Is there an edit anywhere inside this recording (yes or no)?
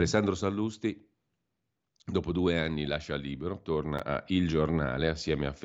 no